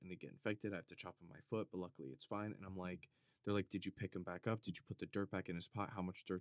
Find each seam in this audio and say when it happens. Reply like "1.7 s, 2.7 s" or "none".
2.5 s